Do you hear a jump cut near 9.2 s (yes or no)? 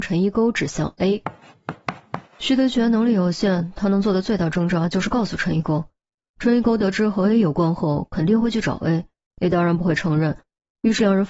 no